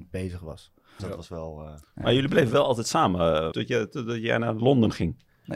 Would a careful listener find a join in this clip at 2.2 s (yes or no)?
no